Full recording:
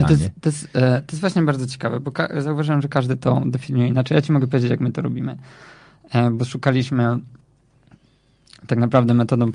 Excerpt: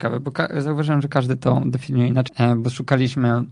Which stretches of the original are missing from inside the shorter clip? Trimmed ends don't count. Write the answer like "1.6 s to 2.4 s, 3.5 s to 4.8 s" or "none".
4.1 s to 6.0 s